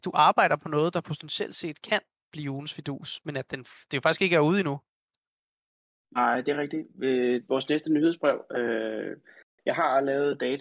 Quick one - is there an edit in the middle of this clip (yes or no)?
no